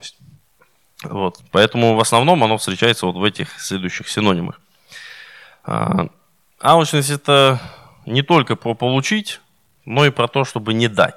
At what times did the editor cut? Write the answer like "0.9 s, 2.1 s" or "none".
1.4 s